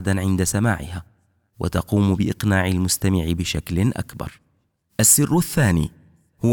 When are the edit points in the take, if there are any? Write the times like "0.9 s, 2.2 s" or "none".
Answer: none

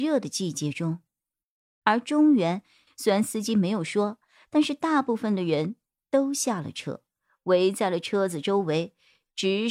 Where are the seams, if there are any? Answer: 2.9 s

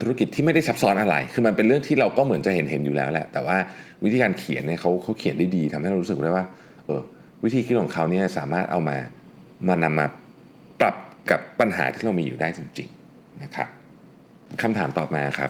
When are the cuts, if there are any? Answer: 6.9 s

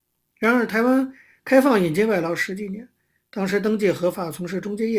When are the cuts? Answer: none

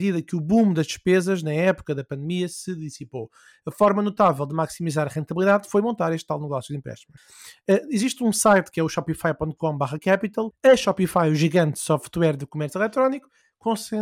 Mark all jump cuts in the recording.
10.5 s

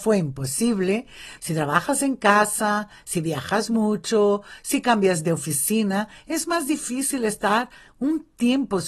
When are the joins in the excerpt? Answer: 1.4 s

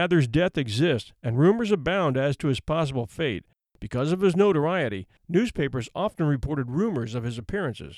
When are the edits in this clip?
3.6 s

